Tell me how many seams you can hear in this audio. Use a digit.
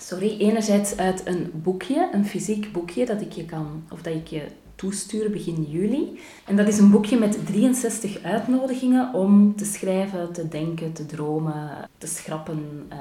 2